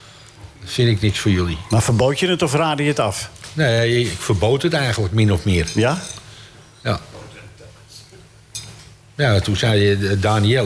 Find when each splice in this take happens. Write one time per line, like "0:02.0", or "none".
none